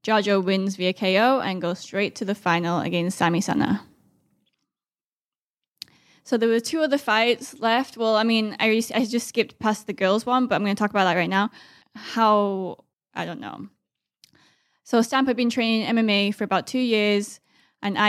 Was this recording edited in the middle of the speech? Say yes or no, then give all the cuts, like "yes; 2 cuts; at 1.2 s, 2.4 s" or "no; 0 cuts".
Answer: yes; 2 cuts; at 11.8 s, 12.9 s